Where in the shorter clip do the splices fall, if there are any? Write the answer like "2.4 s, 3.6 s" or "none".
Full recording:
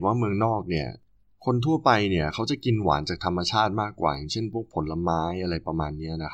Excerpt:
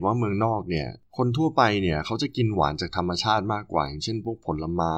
1.1 s